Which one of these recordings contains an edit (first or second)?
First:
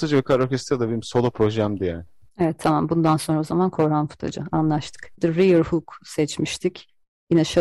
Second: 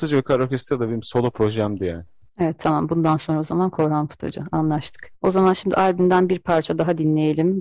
first